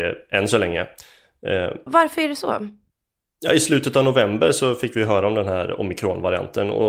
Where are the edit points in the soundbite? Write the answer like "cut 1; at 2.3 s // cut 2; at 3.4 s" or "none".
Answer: cut 1; at 1.9 s